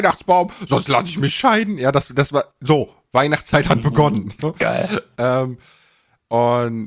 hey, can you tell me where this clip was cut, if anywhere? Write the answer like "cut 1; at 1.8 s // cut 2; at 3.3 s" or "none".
cut 1; at 4.4 s